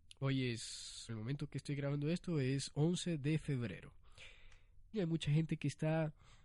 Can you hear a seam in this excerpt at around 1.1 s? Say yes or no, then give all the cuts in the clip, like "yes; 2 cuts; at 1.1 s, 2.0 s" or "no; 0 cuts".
yes; 2 cuts; at 1.1 s, 4.9 s